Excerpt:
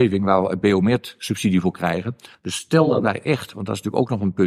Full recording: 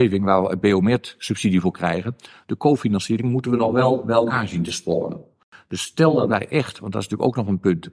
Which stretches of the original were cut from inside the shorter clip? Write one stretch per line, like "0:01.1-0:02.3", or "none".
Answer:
0:02.3-0:05.6